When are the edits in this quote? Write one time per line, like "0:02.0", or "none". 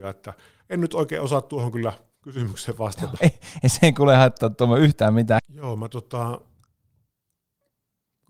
0:05.4